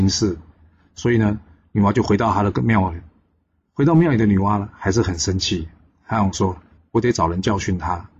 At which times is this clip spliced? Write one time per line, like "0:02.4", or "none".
0:06.8